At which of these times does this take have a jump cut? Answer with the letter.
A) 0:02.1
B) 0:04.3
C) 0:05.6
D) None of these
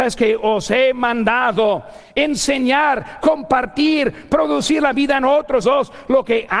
C